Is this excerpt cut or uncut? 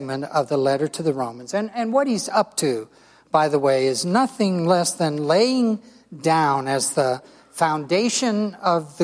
uncut